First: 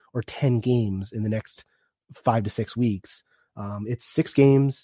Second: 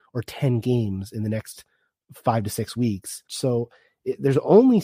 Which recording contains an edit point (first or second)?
second